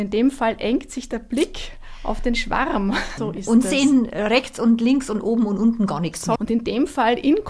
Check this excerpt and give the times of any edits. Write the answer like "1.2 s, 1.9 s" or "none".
3.2 s, 6.4 s